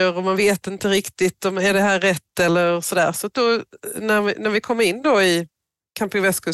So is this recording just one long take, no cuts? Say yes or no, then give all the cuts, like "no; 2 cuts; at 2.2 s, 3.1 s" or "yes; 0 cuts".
yes; 0 cuts